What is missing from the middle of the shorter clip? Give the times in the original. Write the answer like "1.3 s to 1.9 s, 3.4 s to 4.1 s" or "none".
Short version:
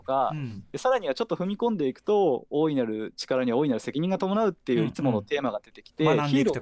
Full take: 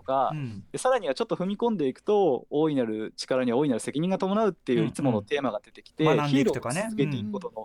none